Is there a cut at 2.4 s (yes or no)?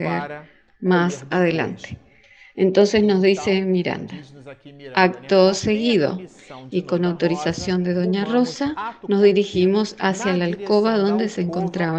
no